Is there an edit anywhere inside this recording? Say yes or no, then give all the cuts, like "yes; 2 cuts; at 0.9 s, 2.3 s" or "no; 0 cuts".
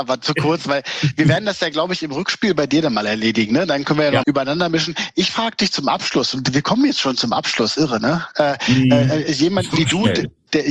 yes; 1 cut; at 4.2 s